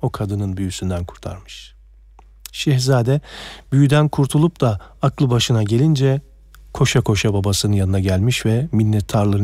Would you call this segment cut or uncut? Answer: uncut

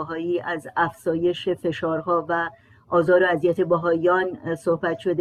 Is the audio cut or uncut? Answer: uncut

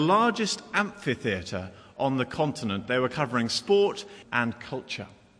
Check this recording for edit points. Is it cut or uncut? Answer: cut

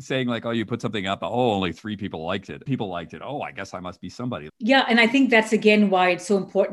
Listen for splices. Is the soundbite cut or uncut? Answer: cut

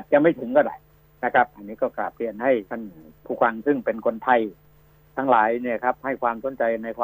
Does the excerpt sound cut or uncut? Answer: cut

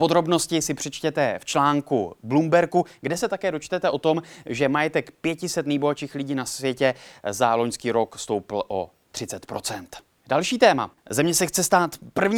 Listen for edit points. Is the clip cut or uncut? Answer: cut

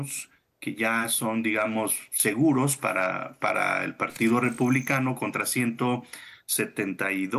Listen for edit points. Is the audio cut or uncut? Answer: uncut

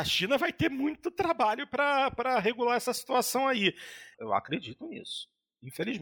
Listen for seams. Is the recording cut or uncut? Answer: cut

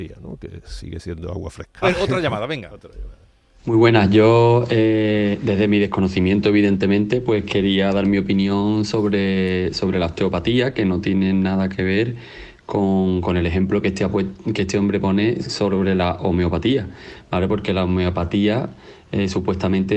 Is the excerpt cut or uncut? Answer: cut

